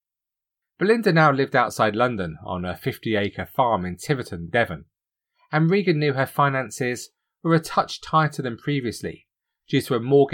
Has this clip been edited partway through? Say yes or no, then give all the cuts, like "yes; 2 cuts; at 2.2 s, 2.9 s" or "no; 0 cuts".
no; 0 cuts